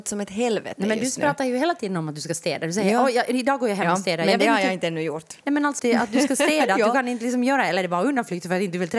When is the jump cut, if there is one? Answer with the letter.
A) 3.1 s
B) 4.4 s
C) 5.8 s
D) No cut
C